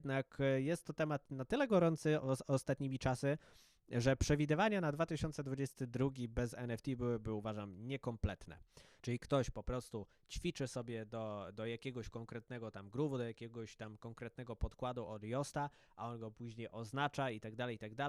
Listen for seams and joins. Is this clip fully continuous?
no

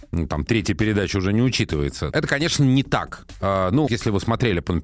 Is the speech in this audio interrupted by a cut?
yes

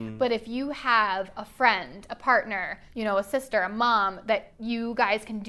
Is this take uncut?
yes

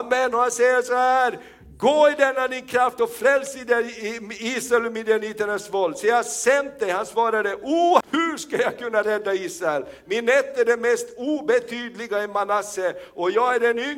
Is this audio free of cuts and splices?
no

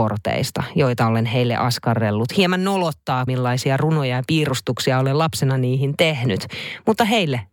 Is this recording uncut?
no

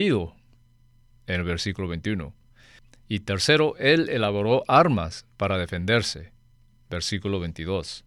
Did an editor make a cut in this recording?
no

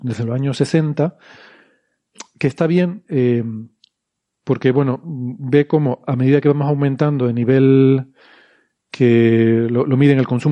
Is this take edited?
no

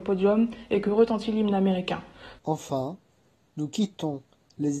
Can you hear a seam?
yes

